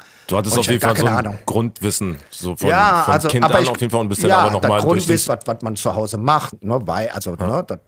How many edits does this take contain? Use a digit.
2